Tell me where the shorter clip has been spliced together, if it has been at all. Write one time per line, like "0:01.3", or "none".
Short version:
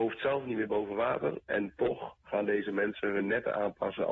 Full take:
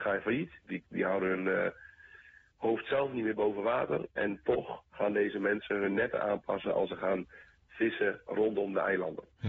none